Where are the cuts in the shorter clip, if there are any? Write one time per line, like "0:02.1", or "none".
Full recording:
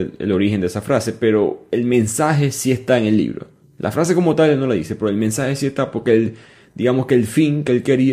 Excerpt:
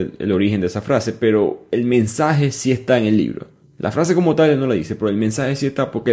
none

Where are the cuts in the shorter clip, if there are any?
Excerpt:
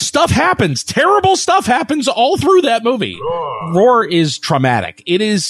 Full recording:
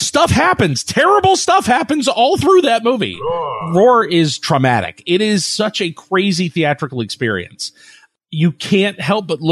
none

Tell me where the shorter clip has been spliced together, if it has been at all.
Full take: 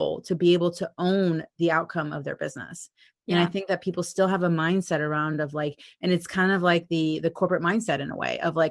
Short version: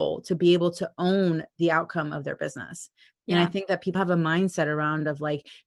0:03.9

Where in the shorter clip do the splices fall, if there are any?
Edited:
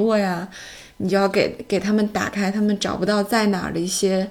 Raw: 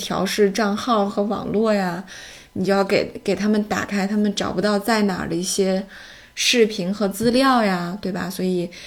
none

